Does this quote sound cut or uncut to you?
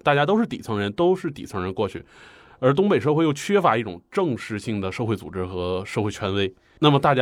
uncut